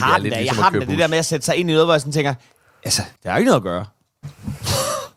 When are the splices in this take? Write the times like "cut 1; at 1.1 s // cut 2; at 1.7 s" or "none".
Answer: cut 1; at 3.2 s